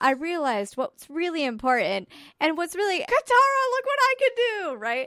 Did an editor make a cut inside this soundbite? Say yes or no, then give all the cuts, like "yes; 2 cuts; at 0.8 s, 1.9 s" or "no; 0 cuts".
yes; 1 cut; at 3.1 s